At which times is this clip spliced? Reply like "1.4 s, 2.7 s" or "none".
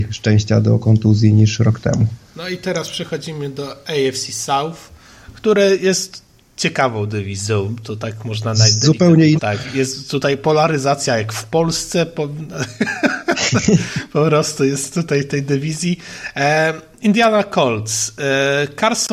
9.4 s